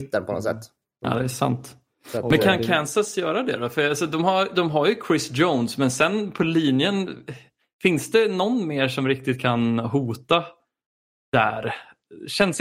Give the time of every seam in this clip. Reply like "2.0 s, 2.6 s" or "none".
none